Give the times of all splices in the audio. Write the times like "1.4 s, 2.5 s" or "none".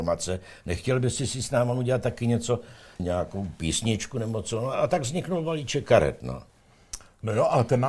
3.0 s